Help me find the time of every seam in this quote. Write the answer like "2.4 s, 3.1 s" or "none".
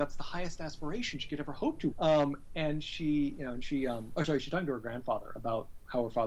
1.9 s

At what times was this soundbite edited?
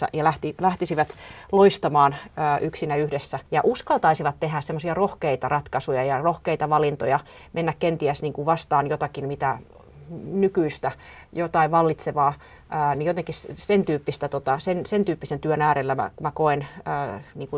3.5 s

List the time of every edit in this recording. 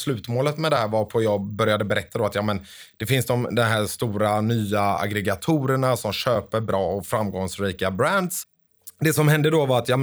none

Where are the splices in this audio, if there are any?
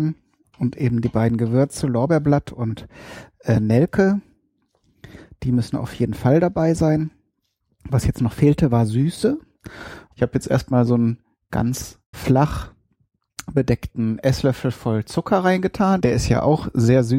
10.1 s, 12.1 s, 16.0 s

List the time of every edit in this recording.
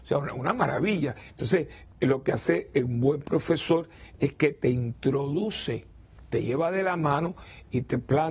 none

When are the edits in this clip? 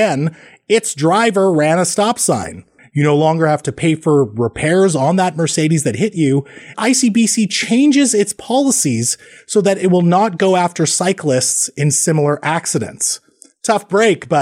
2.8 s, 6.7 s

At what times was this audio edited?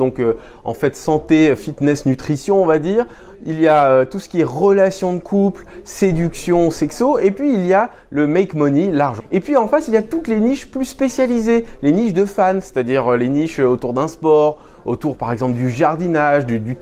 9.2 s

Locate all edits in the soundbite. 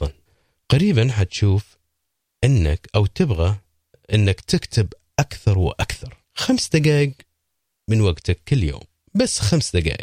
6.2 s

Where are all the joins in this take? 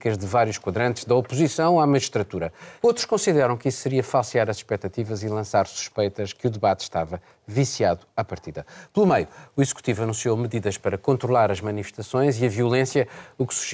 2.8 s

